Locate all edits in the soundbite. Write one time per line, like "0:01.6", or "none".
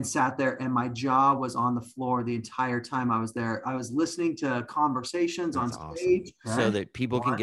0:06.4